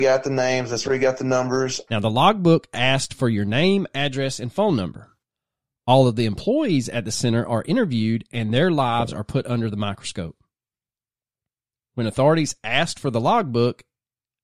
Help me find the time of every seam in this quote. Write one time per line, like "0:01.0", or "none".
0:01.9